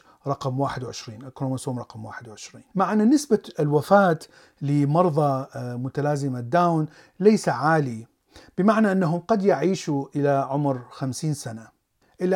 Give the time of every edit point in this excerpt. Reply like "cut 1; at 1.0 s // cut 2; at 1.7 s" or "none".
cut 1; at 2.7 s